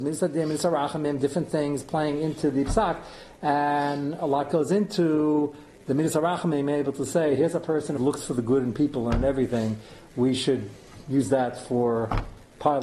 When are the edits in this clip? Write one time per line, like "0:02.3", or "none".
0:08.0